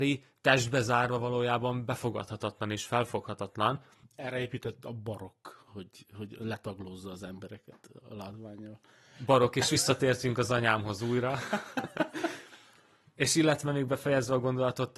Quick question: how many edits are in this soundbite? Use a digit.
0